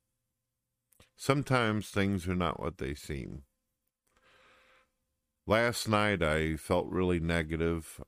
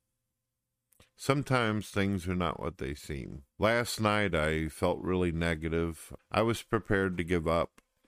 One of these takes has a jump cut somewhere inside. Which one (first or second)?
second